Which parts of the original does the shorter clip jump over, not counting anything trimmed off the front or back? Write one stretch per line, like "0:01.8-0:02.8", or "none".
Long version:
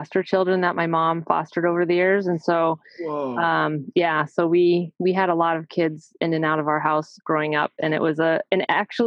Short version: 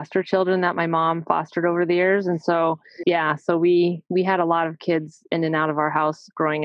0:03.0-0:03.9